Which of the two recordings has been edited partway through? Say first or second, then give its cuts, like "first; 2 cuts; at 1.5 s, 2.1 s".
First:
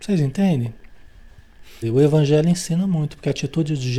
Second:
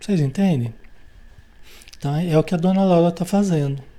first; 1 cut; at 1.8 s